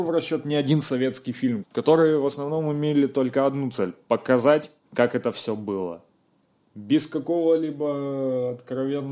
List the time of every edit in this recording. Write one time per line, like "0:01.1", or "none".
0:01.6